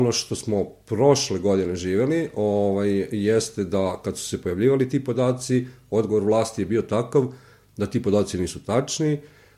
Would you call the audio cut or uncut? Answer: uncut